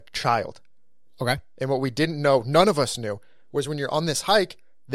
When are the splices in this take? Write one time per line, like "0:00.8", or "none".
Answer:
none